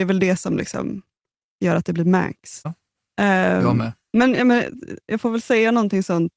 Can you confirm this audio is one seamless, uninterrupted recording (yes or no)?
no